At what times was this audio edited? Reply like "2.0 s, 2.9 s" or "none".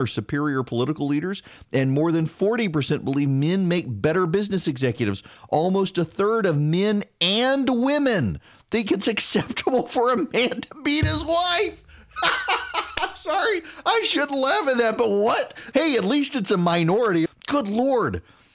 15.7 s, 17.3 s